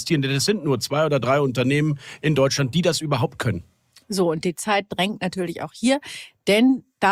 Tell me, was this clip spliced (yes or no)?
no